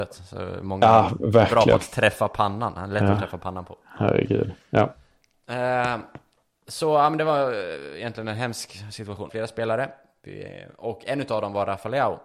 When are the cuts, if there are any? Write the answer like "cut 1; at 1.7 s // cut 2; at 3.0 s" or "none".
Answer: cut 1; at 9.3 s